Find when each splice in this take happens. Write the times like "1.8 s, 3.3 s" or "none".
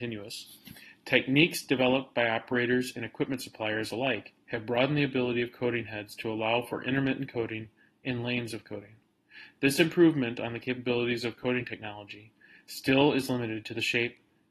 none